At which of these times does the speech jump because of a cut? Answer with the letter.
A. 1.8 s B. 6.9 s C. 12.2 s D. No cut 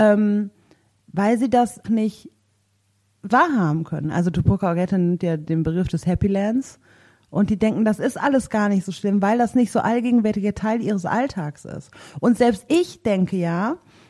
A